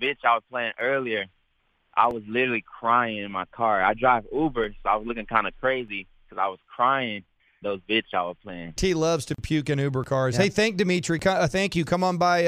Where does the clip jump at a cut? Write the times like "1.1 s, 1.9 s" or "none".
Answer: 7.6 s, 8.8 s